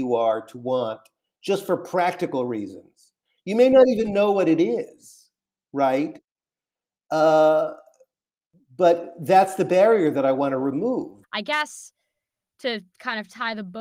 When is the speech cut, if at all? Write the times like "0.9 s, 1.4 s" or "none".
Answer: 11.2 s